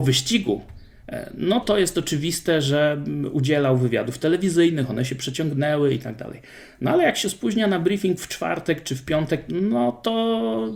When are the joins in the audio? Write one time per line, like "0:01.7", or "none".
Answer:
0:01.6
0:09.5